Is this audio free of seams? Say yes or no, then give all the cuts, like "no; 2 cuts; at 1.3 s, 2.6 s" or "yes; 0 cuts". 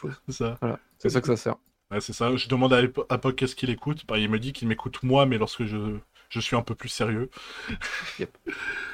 yes; 0 cuts